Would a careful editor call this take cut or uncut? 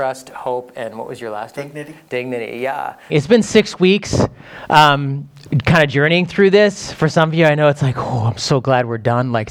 cut